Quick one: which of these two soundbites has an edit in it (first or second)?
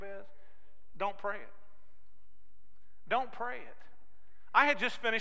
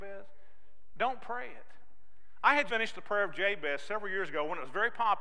second